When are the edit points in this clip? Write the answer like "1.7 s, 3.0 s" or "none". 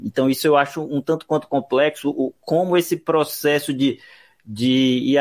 none